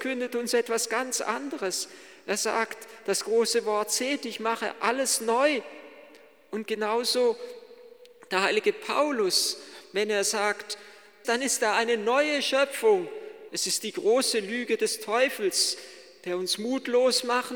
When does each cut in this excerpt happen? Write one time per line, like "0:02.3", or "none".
0:11.2
0:13.5